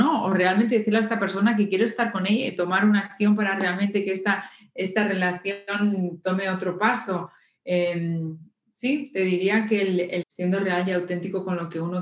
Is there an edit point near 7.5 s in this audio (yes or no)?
no